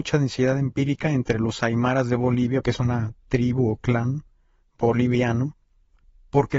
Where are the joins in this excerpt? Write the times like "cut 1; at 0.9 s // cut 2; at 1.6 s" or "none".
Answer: cut 1; at 2.6 s